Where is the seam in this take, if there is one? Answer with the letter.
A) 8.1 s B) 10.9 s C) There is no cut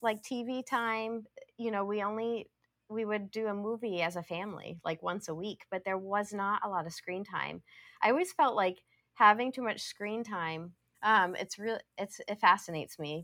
B